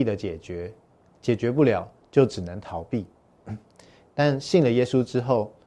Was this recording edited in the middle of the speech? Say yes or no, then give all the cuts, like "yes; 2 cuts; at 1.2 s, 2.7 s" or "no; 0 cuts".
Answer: no; 0 cuts